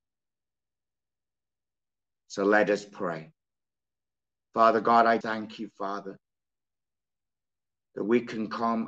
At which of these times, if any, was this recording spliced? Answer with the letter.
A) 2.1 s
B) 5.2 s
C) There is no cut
B